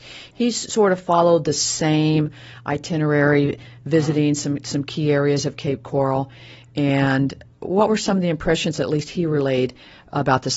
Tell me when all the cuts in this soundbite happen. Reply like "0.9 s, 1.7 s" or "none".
none